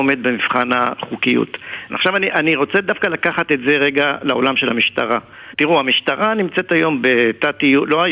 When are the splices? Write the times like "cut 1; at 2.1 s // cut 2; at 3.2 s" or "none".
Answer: cut 1; at 1.9 s // cut 2; at 5.5 s